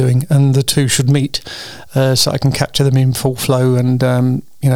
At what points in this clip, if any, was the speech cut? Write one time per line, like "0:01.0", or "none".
none